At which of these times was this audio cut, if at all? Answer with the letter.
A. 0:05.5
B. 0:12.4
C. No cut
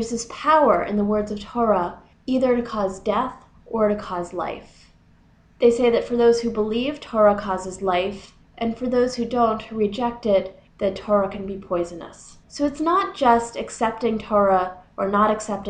B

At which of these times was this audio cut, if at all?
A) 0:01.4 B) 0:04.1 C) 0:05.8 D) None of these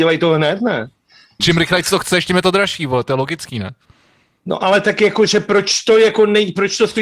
A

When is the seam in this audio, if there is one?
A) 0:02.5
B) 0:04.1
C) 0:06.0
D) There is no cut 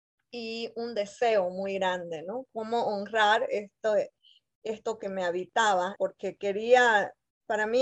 C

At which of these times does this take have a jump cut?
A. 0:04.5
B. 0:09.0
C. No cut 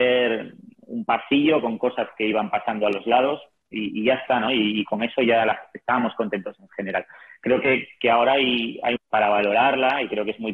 B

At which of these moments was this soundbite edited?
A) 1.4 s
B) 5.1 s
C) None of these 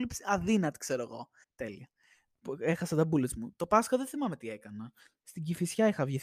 A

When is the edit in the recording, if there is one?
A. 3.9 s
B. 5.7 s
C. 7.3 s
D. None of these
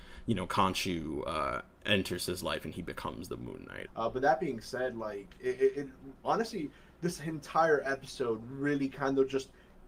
A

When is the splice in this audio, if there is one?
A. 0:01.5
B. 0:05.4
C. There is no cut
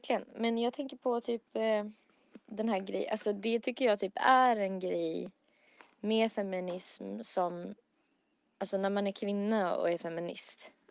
C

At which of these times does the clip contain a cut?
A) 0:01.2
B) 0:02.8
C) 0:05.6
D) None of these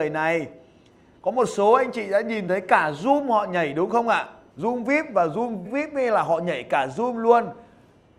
C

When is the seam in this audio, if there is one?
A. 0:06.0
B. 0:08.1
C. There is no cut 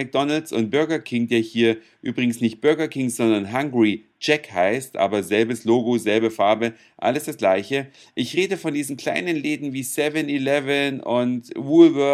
C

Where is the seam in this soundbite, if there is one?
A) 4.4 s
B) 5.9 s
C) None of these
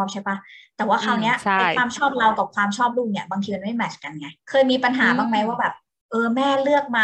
A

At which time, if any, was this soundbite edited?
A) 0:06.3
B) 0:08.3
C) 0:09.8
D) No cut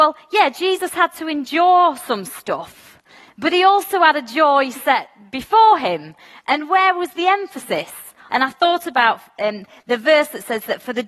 B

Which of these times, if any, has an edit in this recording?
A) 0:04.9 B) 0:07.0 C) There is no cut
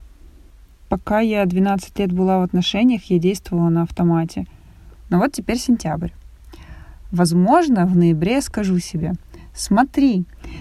A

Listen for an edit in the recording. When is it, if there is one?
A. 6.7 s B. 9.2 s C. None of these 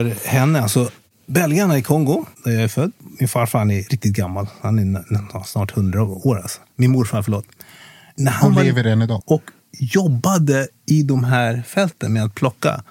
B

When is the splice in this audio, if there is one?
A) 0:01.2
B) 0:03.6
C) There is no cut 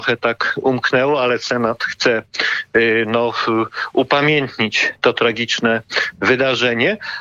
C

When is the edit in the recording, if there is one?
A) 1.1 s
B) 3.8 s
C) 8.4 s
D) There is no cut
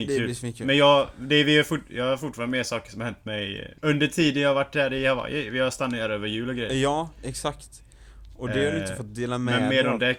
B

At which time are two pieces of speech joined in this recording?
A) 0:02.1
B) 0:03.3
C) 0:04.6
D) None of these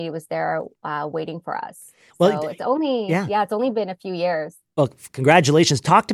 D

